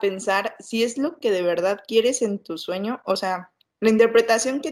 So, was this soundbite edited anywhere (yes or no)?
no